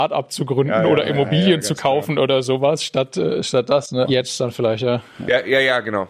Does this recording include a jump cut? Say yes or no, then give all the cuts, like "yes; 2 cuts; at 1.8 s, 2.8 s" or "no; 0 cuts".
yes; 1 cut; at 4.0 s